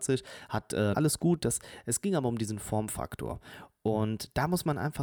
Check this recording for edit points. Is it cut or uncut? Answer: cut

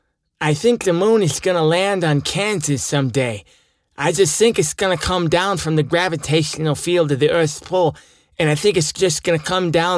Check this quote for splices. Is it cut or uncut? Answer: uncut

